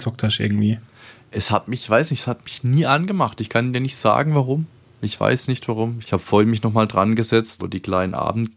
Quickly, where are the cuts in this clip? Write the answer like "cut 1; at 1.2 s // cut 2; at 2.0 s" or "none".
cut 1; at 6.0 s // cut 2; at 7.6 s